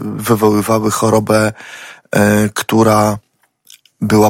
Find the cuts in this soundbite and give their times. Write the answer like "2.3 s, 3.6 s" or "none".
none

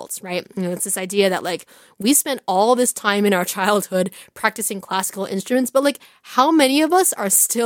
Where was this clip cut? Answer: none

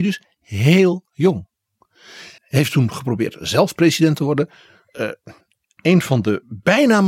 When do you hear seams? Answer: 2.4 s

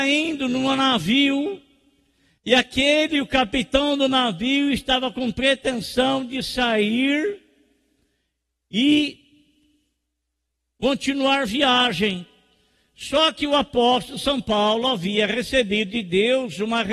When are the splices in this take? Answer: 2.4 s

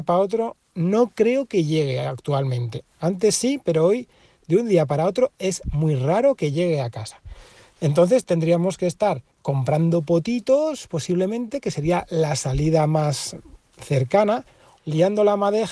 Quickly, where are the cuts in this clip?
14.8 s

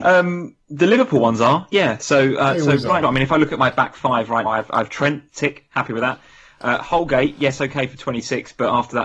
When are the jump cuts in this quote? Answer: 3.0 s, 4.4 s

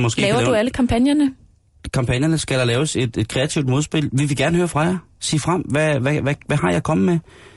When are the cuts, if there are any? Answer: none

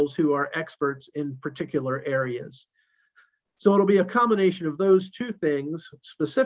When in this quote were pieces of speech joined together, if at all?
none

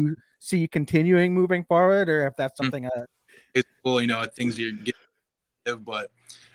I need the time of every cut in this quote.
3.0 s

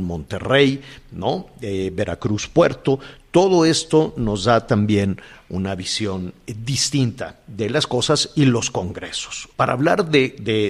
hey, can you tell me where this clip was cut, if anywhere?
9.5 s

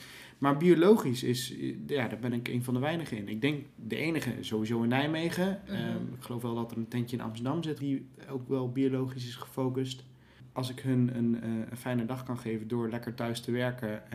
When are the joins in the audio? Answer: 7.8 s, 10.5 s

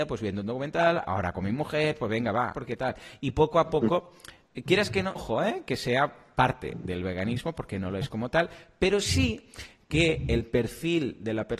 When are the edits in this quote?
2.5 s, 5.1 s

